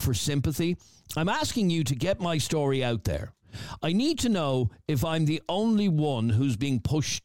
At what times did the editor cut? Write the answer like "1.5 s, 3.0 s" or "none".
none